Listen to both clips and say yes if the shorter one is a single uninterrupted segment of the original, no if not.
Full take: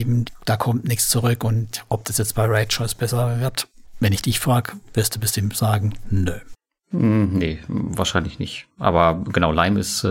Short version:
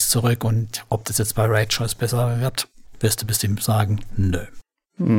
no